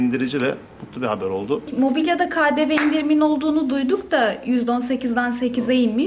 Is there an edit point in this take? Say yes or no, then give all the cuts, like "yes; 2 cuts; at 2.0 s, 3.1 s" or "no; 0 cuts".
no; 0 cuts